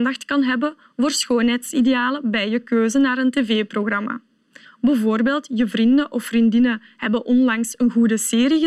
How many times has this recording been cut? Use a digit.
1